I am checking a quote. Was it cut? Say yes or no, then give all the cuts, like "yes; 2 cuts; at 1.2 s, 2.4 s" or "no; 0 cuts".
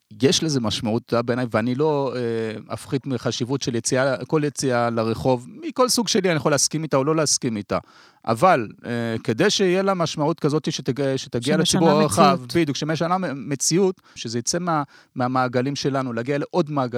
yes; 1 cut; at 14.2 s